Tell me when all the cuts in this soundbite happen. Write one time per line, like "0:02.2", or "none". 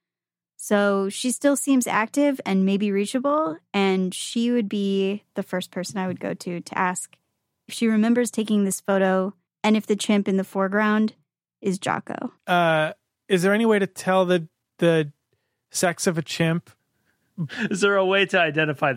0:09.5
0:12.4
0:16.8